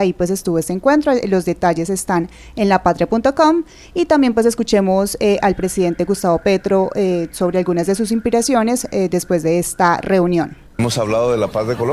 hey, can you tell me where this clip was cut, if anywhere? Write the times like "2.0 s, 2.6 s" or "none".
10.7 s